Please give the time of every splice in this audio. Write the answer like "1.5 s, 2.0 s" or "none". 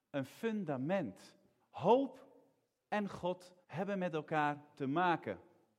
1.6 s, 3.6 s